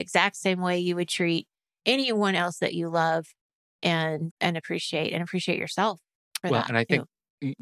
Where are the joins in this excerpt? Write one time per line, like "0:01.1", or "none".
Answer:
0:04.3